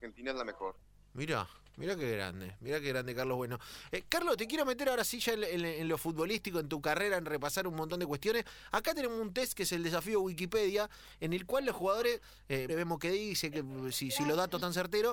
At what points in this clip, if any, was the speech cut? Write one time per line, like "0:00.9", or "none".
0:12.7